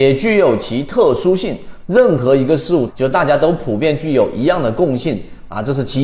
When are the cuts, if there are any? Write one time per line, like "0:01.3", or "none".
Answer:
0:01.8
0:02.9